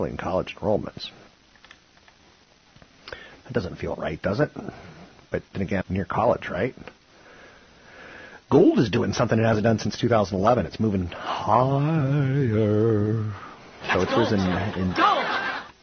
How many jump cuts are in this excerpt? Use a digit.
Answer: 1